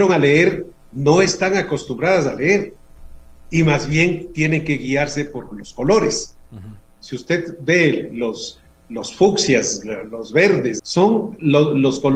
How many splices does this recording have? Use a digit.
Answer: 2